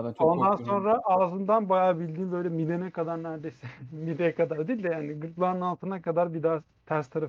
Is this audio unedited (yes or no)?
yes